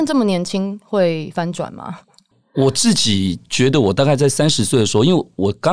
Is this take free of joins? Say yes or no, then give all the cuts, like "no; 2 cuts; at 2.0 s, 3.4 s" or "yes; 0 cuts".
yes; 0 cuts